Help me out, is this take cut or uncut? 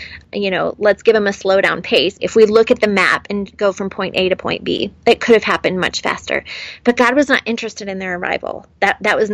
cut